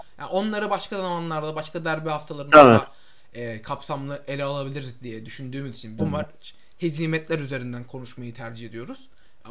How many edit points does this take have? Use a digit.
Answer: 2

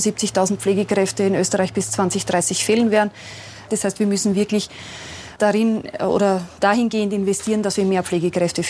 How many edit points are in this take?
2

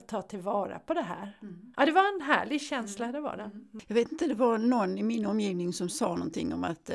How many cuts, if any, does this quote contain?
1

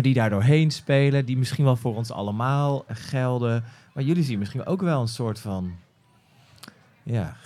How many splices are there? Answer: 1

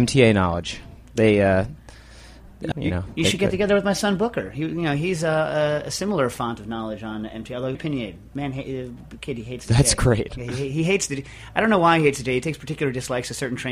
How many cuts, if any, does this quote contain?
2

